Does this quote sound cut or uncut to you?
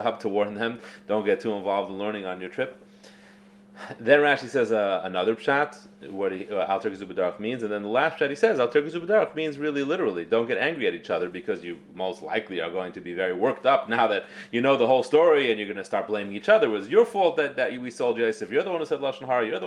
uncut